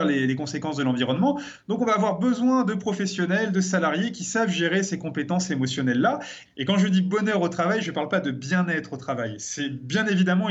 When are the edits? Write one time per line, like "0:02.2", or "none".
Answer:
0:01.6
0:06.5